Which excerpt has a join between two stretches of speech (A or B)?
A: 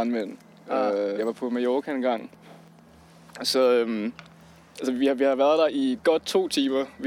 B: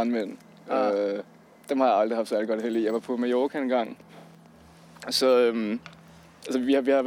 A